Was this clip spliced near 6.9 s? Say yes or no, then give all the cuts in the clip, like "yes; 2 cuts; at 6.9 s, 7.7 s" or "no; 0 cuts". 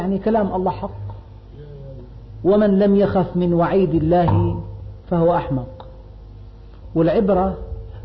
no; 0 cuts